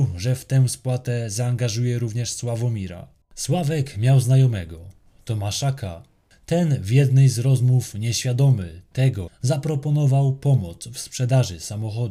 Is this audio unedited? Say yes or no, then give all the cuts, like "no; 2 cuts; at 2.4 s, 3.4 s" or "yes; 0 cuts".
no; 2 cuts; at 3.2 s, 9.3 s